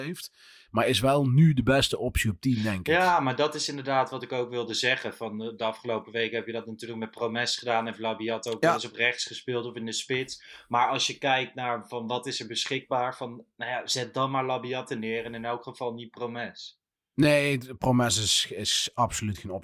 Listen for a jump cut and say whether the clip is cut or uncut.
uncut